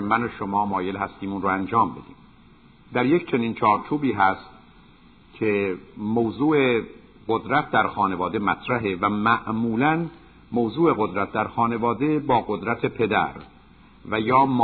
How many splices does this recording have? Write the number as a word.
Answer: zero